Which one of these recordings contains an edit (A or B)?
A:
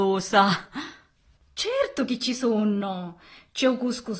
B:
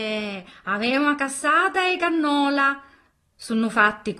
A